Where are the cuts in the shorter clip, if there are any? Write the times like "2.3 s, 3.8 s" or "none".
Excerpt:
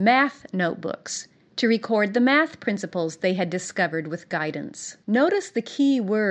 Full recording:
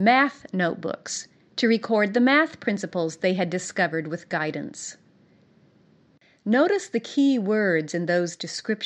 5.0 s